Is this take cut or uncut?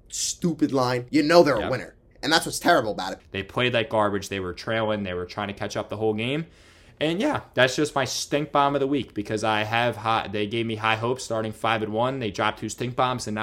cut